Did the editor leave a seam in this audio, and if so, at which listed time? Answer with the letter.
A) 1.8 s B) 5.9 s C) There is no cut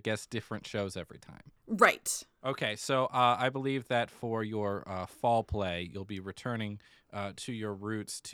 C